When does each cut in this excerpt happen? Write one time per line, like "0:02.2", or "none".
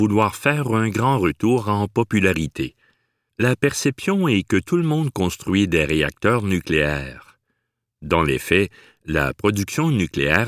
0:03.3